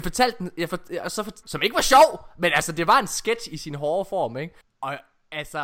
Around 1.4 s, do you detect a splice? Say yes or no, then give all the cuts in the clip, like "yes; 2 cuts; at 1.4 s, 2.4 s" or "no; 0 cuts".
yes; 2 cuts; at 1.4 s, 4.6 s